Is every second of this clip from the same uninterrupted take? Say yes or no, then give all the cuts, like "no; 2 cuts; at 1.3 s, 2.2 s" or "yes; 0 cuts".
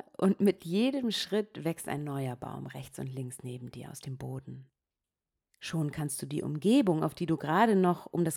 yes; 0 cuts